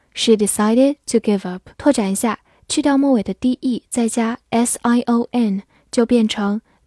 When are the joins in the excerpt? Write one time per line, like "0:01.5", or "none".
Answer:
0:01.7